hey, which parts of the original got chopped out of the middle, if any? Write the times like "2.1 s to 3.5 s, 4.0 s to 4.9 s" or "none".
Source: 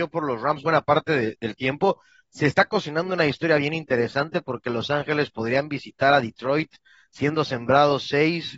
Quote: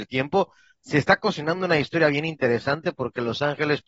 none